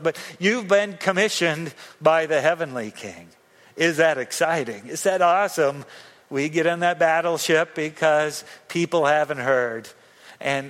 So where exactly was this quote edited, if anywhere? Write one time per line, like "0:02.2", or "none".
0:06.2